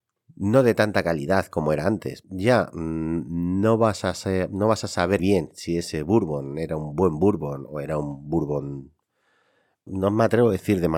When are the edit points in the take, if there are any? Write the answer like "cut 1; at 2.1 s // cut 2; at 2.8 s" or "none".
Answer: cut 1; at 2.2 s // cut 2; at 5.2 s // cut 3; at 9.9 s